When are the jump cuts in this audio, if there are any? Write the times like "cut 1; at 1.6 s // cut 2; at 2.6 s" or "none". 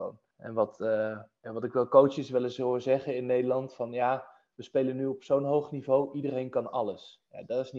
none